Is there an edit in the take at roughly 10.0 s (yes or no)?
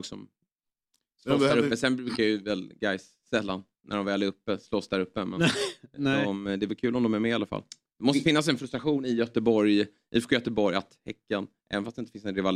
no